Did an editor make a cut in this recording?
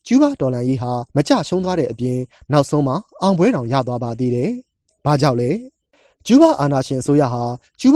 yes; 1 cut; at 1.1 s

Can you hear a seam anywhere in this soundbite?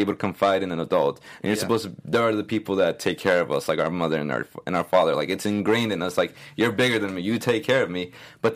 no; 0 cuts

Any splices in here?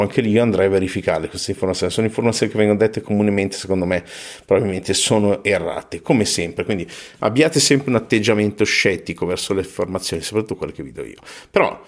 no; 0 cuts

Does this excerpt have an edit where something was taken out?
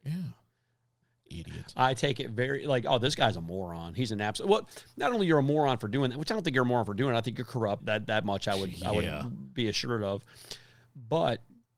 yes; 1 cut; at 7.8 s

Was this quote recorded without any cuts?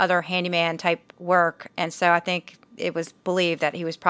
yes; 0 cuts

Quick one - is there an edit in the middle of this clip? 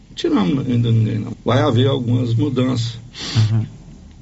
yes; 1 cut; at 1.3 s

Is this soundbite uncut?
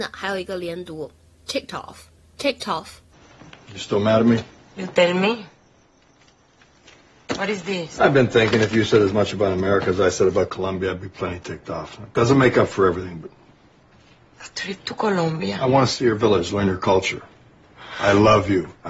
yes; 0 cuts

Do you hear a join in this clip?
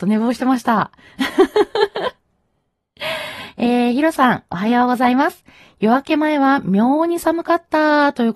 no; 0 cuts

